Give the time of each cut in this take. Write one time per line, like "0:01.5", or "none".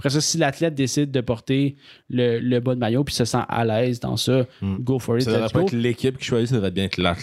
none